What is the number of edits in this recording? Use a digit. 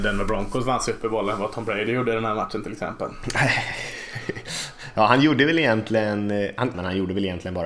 1